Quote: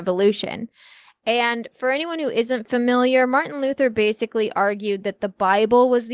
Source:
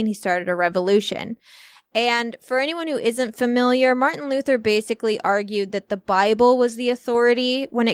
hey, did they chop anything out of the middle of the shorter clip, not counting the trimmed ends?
no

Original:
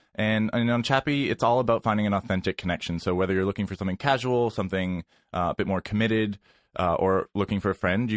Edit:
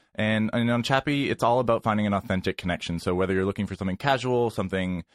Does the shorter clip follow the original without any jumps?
yes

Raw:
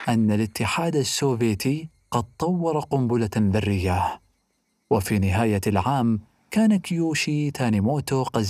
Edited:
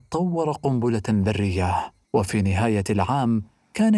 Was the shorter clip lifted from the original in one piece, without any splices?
no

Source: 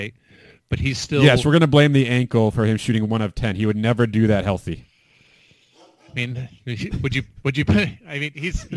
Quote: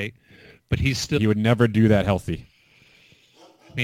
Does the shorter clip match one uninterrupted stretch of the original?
no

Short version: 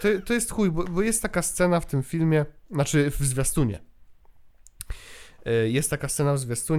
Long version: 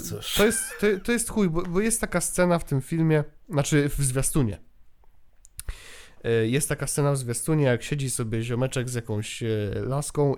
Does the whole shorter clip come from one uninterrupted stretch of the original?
yes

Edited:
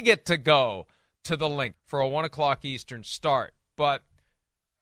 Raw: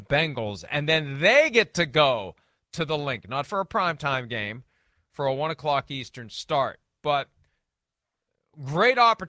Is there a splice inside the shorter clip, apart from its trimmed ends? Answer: yes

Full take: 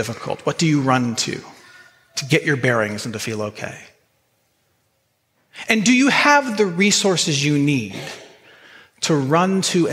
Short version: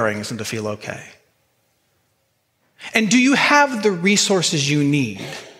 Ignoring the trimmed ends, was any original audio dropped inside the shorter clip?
no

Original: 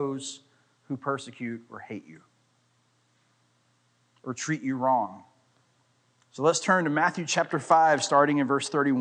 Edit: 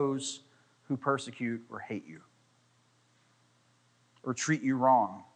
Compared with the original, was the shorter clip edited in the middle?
no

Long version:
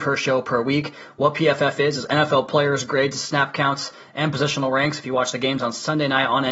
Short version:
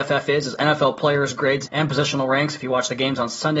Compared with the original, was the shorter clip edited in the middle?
yes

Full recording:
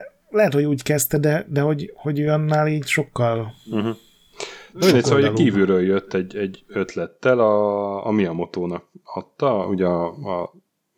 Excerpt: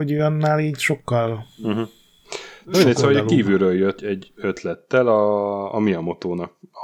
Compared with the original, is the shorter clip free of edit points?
no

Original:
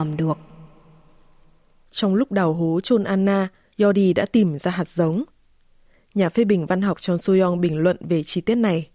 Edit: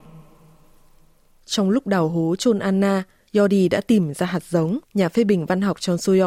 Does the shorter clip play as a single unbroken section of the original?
no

